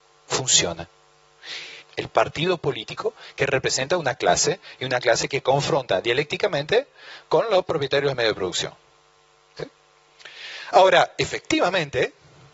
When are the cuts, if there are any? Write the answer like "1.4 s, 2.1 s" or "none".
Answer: 1.8 s

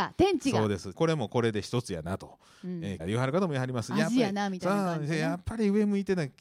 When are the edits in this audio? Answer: 0.9 s, 3.0 s

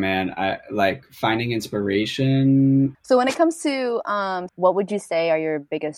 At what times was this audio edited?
2.9 s, 4.5 s

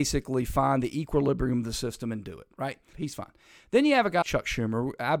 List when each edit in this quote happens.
2.9 s, 4.2 s

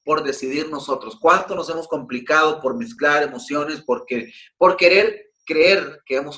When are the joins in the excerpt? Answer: none

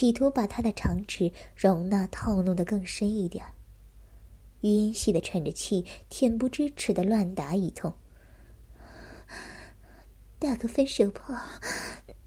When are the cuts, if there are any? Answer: 4.9 s

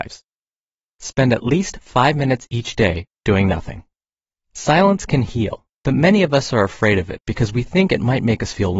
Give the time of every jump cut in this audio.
4.3 s, 5.7 s

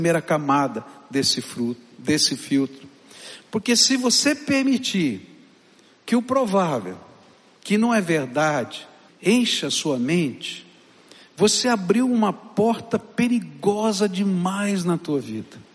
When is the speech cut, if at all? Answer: 9.1 s

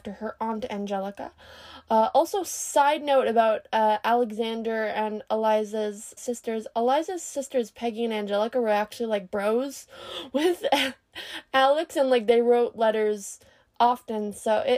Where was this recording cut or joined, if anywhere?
6.2 s

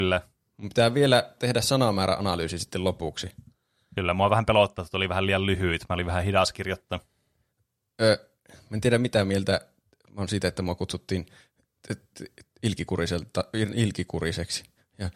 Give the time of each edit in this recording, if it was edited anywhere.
none

